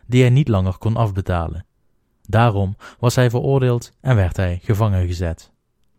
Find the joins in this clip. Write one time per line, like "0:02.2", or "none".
none